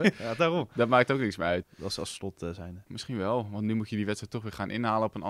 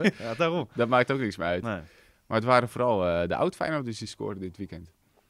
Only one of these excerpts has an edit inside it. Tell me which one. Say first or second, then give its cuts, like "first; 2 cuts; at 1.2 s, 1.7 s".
first; 2 cuts; at 1.6 s, 2.9 s